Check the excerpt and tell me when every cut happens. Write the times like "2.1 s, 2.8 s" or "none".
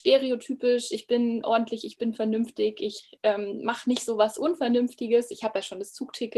none